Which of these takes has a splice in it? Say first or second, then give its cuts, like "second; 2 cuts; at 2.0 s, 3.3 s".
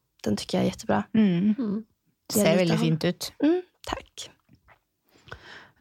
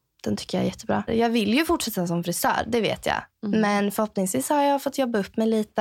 second; 1 cut; at 1.1 s